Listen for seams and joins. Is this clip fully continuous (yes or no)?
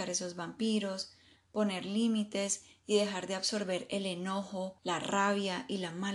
no